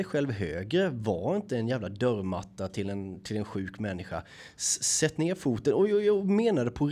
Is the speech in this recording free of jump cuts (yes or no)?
yes